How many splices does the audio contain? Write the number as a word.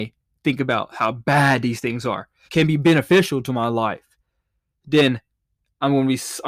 one